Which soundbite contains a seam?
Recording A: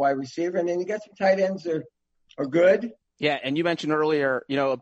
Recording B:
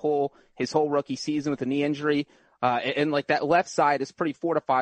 A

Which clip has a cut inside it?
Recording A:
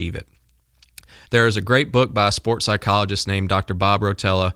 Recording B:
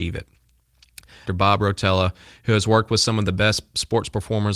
B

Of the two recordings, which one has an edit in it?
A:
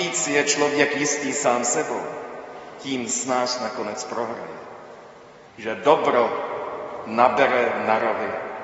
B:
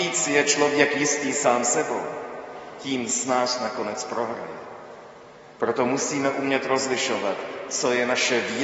A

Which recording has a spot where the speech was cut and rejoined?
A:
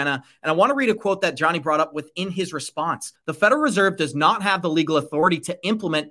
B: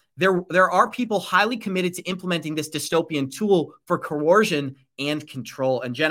A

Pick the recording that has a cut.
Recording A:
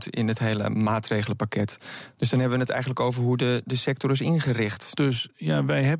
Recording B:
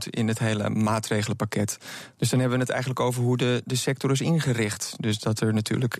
A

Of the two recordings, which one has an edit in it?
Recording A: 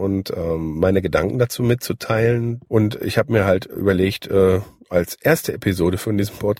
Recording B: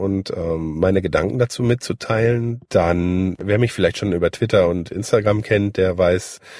A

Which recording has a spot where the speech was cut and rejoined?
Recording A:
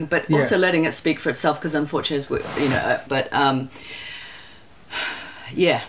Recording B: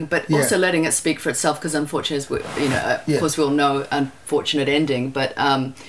A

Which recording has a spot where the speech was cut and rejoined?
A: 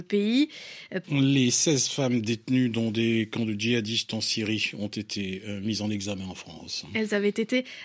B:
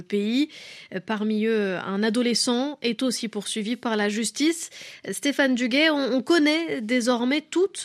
A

